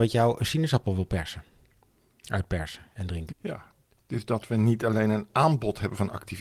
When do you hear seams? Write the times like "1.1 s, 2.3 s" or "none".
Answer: 3.3 s